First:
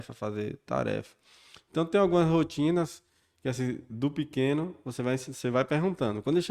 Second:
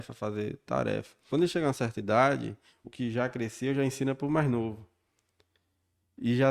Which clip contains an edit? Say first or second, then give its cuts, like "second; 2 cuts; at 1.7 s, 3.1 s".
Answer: second; 2 cuts; at 1.3 s, 2.8 s